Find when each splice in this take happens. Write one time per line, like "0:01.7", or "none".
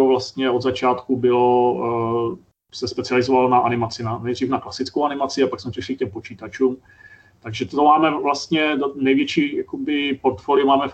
none